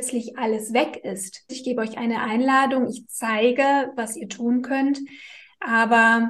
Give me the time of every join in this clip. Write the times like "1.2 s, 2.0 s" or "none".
1.5 s